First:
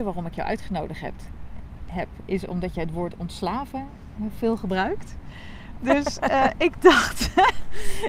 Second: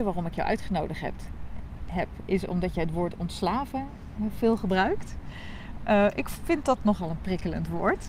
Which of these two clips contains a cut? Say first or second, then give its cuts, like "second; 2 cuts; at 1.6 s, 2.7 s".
first; 1 cut; at 5.8 s